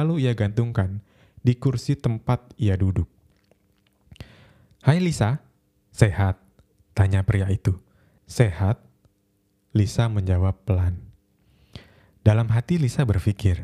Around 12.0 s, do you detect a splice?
no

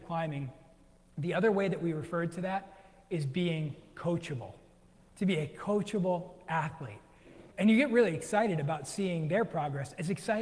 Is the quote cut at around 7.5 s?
yes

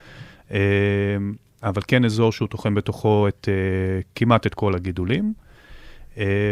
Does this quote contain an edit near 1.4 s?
no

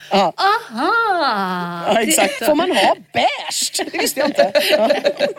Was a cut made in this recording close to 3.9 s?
no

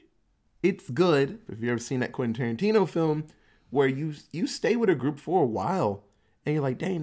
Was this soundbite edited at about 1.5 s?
yes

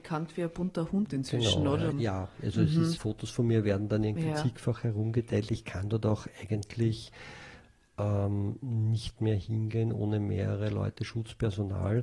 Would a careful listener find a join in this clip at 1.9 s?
yes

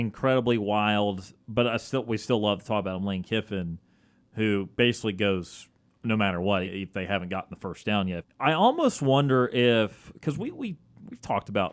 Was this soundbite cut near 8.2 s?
yes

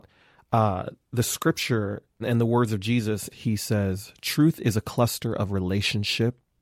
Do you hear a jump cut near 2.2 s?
yes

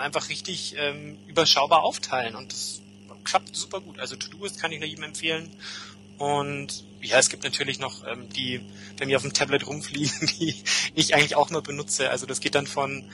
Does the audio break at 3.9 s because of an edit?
no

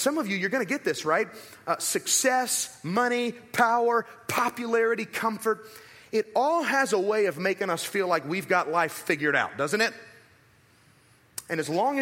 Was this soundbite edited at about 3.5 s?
no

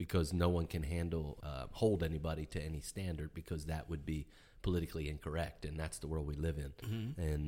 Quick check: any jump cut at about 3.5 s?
no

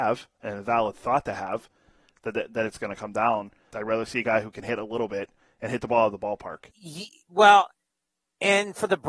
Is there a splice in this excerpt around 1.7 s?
no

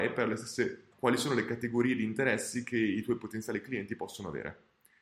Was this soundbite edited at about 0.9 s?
yes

